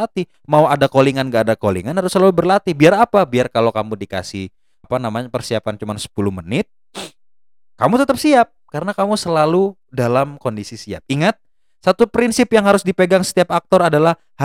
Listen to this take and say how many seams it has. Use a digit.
1